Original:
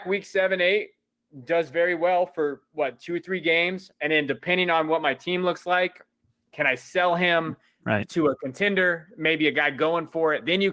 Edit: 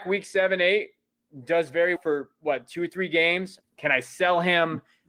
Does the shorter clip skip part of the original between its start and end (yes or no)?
yes